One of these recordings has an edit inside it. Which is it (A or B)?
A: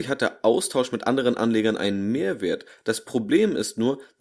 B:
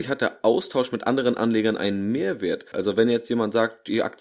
B